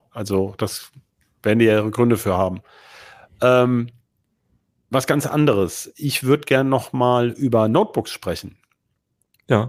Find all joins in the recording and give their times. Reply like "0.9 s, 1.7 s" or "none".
none